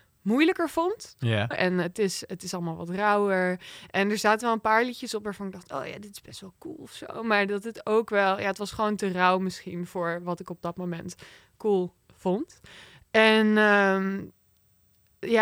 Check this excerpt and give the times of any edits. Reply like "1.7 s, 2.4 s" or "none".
1.5 s